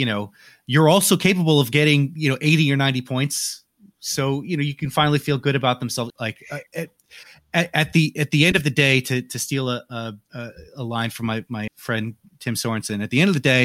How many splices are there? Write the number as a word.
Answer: three